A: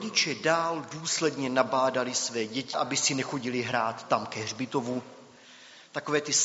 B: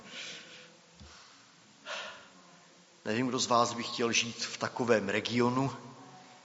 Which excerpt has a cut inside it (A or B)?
A